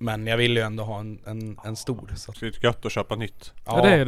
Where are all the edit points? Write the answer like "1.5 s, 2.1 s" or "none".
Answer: 2.3 s